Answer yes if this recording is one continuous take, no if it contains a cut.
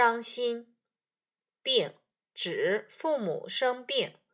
no